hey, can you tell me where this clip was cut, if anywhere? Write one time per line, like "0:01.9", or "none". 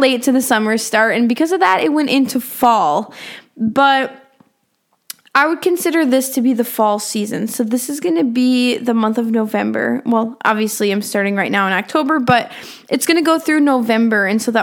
none